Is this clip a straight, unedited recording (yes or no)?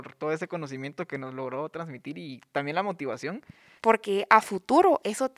no